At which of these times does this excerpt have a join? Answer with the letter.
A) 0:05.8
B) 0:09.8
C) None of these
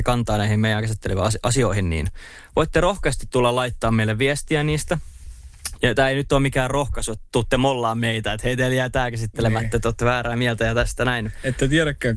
A